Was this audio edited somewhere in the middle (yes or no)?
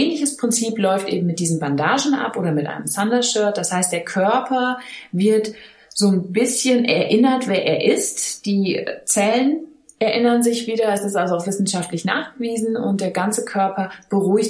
no